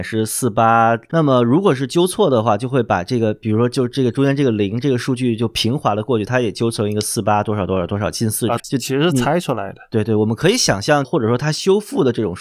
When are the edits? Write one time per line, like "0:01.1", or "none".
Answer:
0:01.1
0:08.6
0:11.0